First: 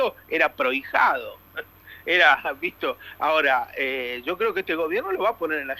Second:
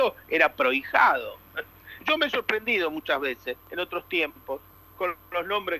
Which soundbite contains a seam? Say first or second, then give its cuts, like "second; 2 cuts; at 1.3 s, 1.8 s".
second; 1 cut; at 2.0 s